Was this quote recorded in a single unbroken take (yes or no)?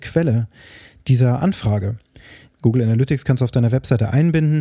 no